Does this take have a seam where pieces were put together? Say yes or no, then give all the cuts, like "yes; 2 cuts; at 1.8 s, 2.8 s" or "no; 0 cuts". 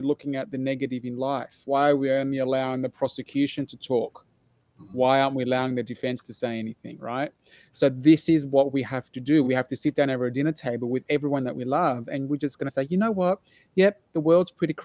no; 0 cuts